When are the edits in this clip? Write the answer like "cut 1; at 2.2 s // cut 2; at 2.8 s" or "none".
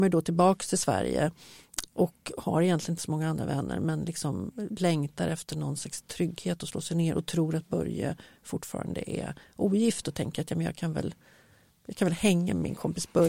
none